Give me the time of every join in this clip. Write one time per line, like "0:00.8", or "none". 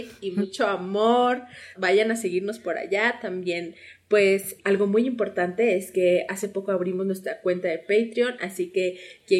0:01.7
0:04.6